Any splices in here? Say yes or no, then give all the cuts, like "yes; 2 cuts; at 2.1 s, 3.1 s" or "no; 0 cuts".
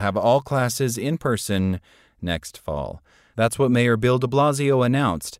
no; 0 cuts